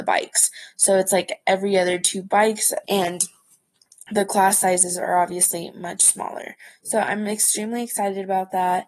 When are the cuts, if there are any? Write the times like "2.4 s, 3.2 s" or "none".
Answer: 2.8 s

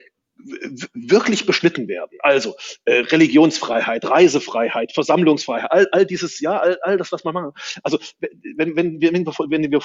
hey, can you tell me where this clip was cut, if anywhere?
none

